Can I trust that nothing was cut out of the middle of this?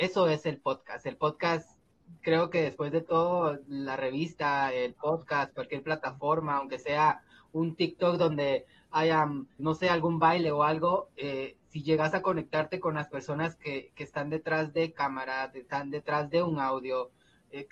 no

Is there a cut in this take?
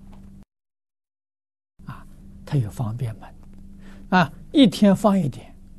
yes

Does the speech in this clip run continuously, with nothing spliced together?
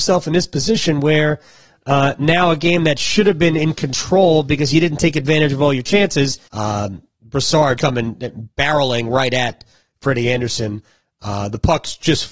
no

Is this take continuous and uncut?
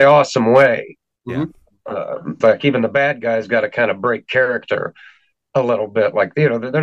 no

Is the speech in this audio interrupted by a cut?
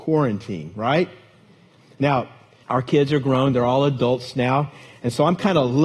yes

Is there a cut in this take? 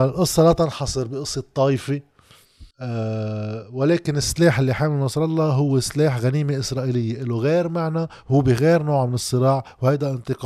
yes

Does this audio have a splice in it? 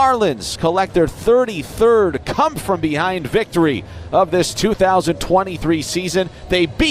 no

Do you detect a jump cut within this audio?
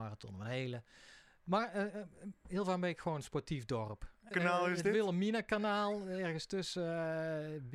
yes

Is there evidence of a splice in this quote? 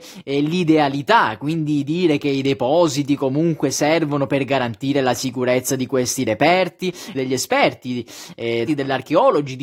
yes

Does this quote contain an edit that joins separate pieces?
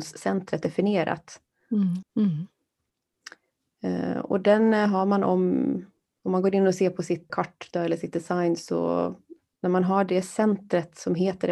yes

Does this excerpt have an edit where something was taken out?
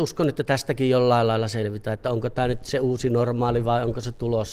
no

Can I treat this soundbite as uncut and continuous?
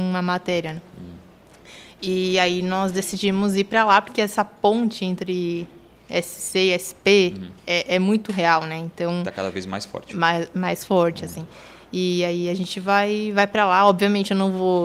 yes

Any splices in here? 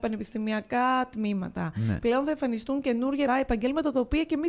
yes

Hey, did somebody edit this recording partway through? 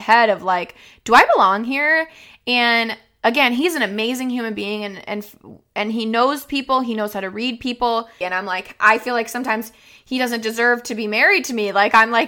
yes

